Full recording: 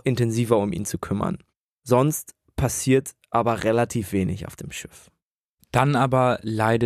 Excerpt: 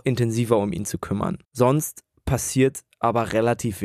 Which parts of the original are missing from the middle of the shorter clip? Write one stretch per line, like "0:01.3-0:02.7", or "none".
0:01.4-0:01.8